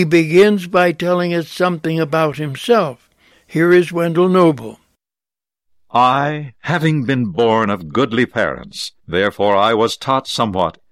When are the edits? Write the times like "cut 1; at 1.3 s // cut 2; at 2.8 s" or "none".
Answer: cut 1; at 6.5 s // cut 2; at 9.0 s